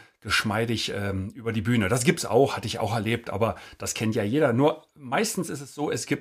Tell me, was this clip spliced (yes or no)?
no